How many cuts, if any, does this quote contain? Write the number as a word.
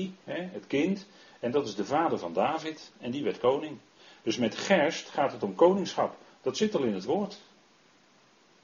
zero